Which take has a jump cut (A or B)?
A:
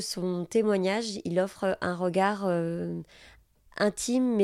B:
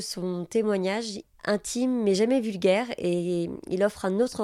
B